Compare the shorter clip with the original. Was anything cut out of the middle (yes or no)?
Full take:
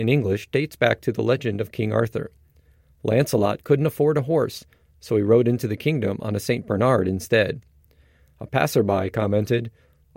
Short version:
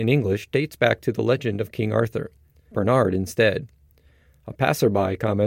yes